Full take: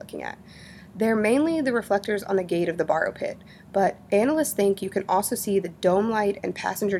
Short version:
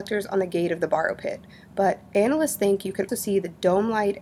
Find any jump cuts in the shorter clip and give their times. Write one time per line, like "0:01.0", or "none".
0:03.1